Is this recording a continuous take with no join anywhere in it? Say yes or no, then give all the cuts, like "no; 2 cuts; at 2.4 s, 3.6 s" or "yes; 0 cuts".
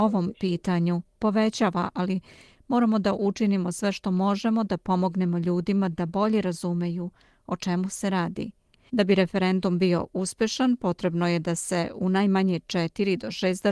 no; 1 cut; at 8.9 s